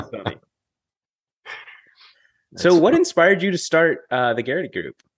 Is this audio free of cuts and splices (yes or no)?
yes